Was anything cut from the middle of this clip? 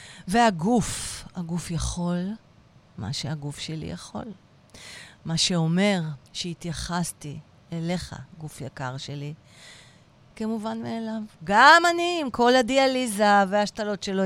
yes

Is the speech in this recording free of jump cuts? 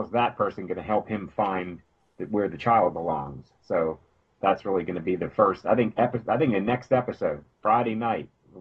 yes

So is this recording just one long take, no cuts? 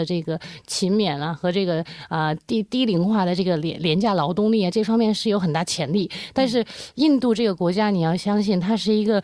yes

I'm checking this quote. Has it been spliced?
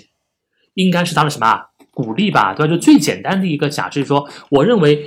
no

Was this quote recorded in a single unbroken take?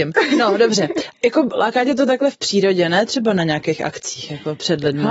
no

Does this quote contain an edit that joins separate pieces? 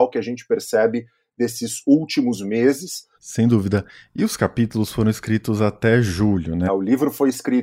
yes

